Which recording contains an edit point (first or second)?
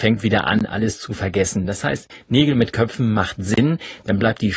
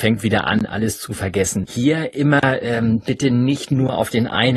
second